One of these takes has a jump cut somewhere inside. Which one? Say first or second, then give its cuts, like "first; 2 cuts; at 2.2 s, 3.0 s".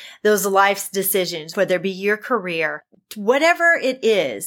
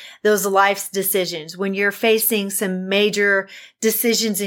first; 2 cuts; at 1.5 s, 3.0 s